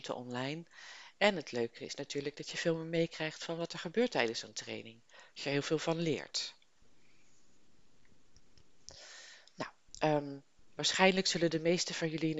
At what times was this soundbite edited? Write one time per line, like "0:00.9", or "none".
0:01.2

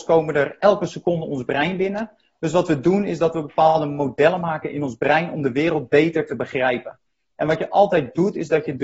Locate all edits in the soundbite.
none

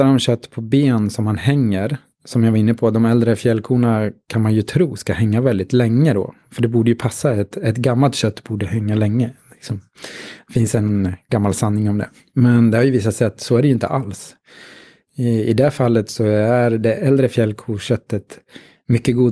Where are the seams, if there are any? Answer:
none

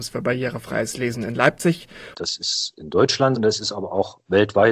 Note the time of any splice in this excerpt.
0:02.1
0:03.4

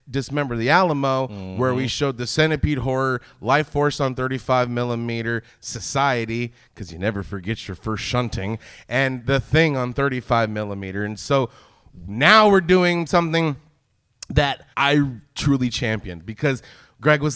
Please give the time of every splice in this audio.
0:14.7

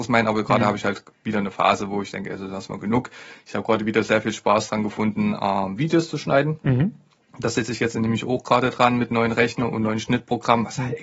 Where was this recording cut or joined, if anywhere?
none

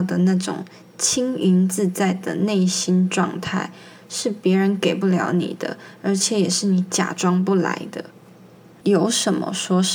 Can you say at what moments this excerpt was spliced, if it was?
0:08.8

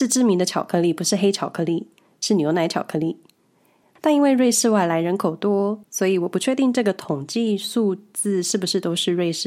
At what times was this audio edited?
0:03.8
0:05.8

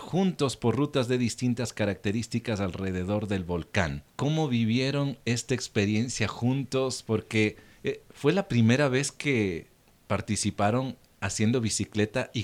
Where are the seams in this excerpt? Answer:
none

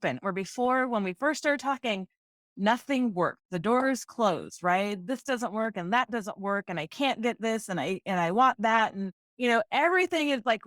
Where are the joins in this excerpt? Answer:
none

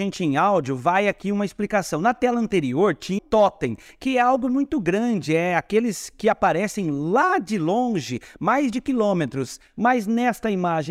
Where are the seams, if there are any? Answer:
0:03.2

